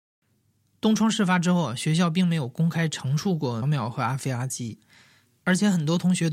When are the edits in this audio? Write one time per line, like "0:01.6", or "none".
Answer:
0:03.6